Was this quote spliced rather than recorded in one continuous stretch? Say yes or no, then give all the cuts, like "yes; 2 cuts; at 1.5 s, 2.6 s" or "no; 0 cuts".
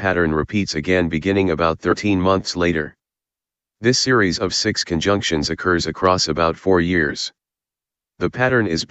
no; 0 cuts